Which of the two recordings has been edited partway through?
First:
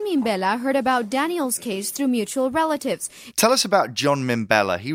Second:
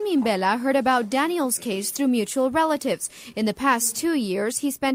first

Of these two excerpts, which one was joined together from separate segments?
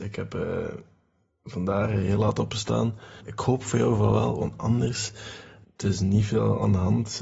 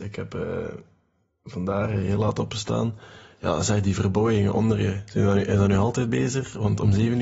first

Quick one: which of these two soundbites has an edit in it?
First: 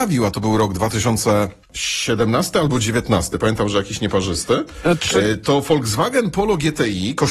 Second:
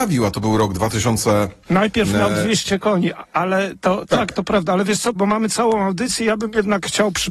second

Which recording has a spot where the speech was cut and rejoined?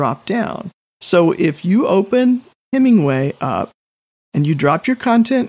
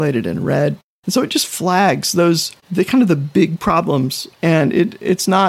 second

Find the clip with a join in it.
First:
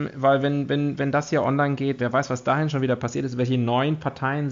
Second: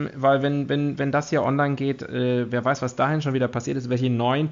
first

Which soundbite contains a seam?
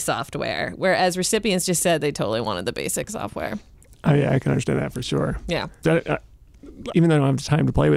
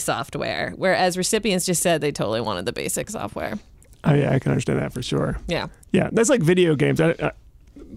first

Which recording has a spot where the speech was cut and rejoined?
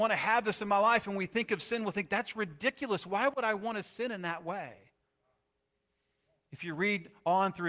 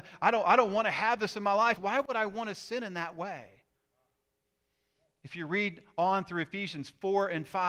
second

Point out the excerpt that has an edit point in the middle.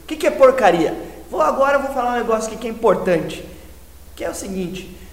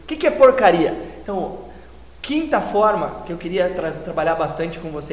second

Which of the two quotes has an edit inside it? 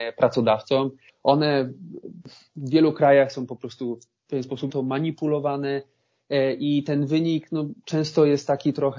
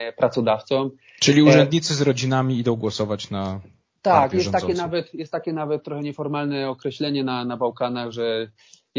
first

